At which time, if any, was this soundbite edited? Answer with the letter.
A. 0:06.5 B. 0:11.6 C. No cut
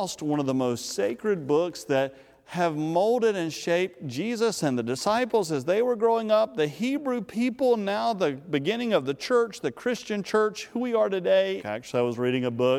B